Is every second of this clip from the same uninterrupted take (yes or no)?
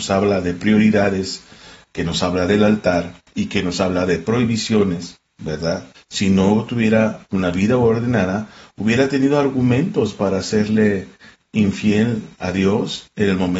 no